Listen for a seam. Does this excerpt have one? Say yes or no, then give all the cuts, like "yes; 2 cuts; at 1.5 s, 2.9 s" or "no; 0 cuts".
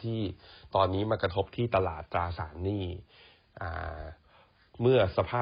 no; 0 cuts